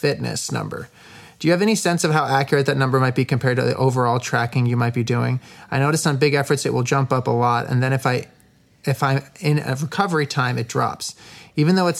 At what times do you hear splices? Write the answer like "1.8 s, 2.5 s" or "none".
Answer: none